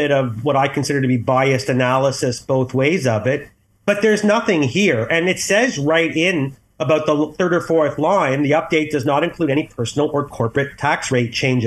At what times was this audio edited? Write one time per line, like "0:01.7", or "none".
none

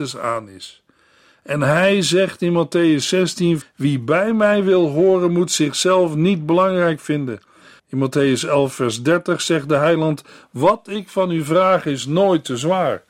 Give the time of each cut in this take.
0:03.6
0:07.8

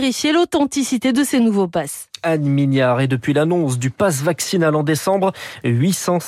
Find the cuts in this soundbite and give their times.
none

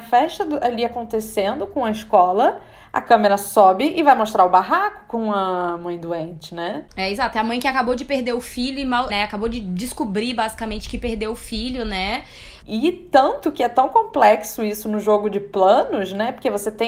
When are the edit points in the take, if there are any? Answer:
0:09.1
0:12.6

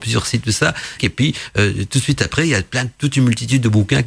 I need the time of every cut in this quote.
0:01.0

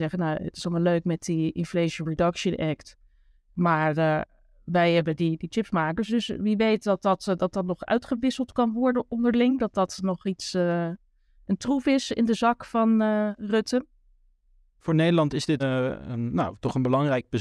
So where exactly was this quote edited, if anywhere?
0:15.6

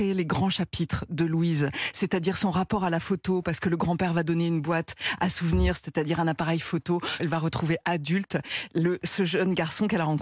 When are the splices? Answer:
0:07.2

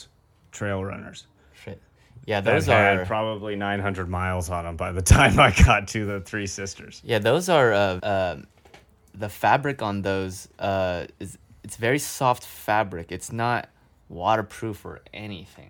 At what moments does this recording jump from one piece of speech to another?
0:08.0
0:10.5

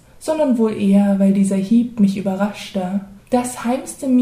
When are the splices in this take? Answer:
0:03.2

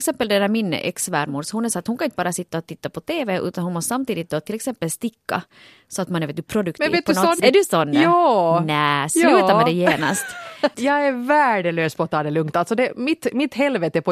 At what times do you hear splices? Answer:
0:07.4
0:10.7

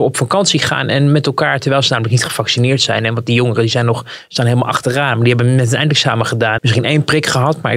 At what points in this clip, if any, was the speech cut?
0:06.6

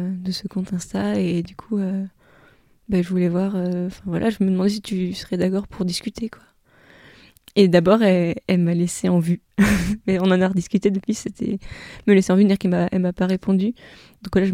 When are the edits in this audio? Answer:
none

